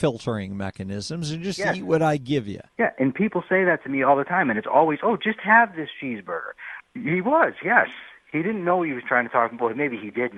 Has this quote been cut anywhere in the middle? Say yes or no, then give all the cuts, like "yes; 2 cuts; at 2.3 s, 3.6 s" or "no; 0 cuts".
yes; 2 cuts; at 2.7 s, 6.8 s